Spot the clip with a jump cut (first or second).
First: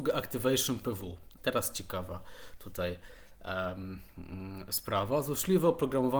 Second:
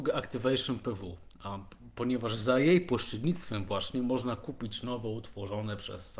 first